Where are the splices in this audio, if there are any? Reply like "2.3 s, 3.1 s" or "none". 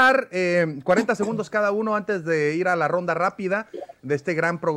none